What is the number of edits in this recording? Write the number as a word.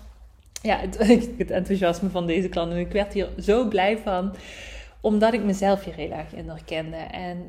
one